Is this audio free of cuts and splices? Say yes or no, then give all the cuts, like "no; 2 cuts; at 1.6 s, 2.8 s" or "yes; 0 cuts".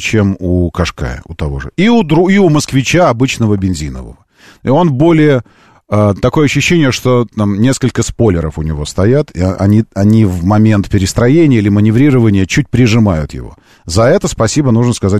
yes; 0 cuts